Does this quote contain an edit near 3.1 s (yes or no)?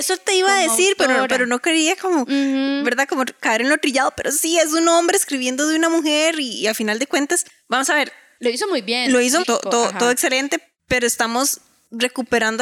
no